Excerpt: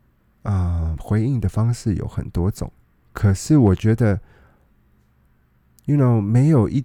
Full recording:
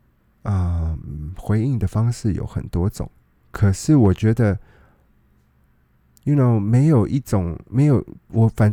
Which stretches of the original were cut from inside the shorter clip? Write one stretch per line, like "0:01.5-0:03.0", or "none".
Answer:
0:01.0-0:01.4